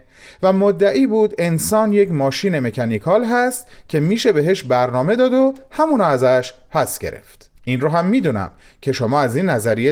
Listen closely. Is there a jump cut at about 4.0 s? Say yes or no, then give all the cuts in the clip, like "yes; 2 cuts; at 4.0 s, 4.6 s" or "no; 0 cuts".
no; 1 cut; at 7.6 s